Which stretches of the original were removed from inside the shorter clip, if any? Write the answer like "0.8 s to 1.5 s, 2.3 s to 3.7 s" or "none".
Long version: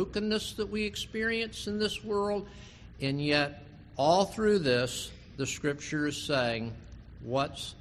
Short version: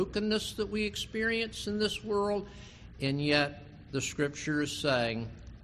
3.9 s to 5.3 s